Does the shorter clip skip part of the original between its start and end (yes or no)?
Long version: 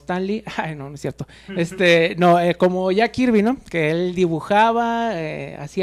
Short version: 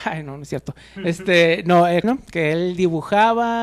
yes